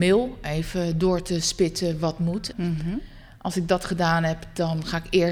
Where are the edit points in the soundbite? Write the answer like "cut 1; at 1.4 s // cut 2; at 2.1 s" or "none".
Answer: cut 1; at 2.5 s